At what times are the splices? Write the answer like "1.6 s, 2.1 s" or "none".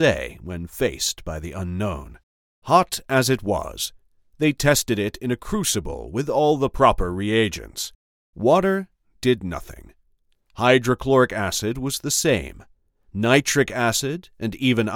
none